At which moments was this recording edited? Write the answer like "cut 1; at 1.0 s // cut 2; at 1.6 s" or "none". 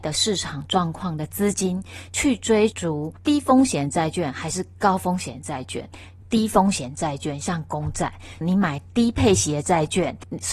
cut 1; at 6.2 s // cut 2; at 8.4 s